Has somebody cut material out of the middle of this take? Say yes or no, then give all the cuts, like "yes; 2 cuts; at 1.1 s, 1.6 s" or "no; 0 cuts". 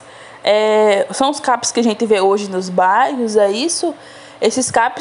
no; 0 cuts